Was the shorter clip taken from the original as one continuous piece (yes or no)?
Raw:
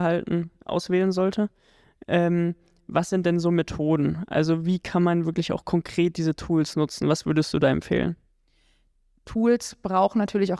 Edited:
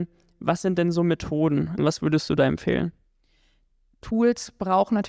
no